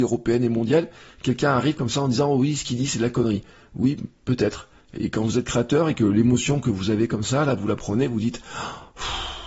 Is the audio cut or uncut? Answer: uncut